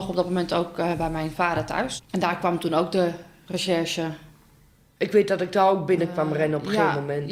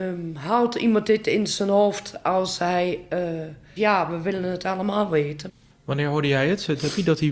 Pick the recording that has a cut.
second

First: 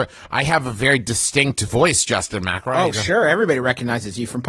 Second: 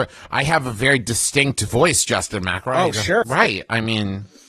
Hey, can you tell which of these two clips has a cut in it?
second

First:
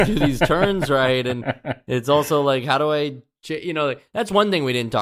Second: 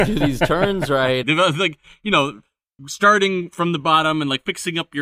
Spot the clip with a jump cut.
second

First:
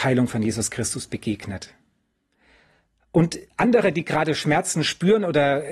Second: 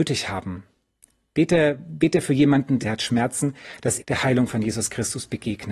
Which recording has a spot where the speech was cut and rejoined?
second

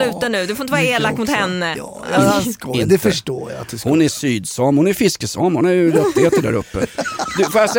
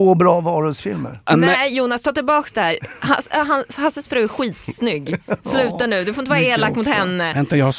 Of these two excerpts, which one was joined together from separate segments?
first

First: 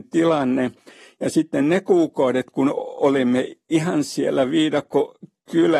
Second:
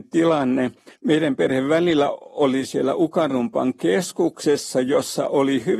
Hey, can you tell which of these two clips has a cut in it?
second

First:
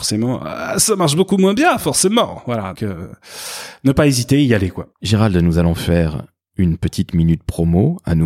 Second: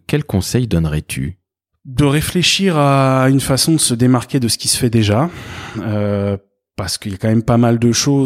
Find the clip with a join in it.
first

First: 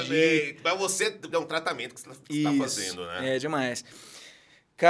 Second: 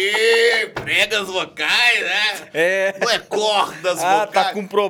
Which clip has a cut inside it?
first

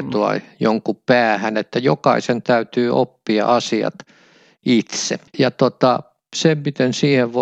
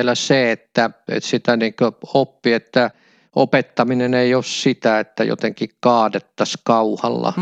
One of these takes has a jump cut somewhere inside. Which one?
first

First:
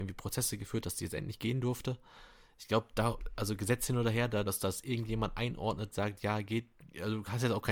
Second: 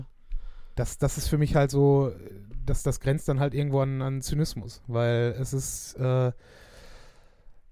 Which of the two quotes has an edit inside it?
first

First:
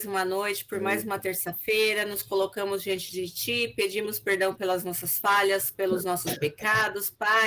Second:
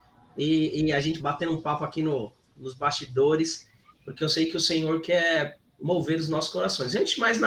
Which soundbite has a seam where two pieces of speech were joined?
second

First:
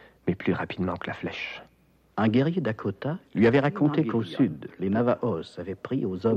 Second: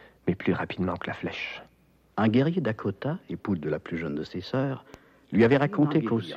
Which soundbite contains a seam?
first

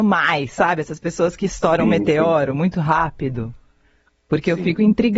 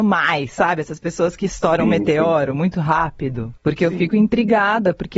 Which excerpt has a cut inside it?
second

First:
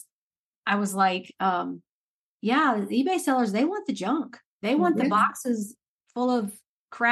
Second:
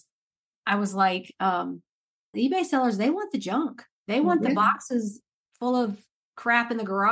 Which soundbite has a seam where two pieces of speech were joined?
second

